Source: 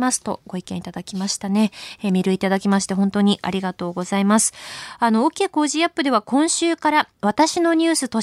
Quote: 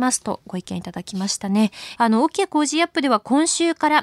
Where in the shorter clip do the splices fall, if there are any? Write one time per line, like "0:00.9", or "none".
0:02.0